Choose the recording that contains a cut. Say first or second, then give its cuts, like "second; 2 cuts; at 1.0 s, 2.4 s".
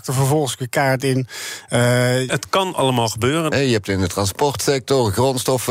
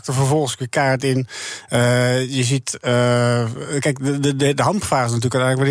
first; 2 cuts; at 2.3 s, 3.5 s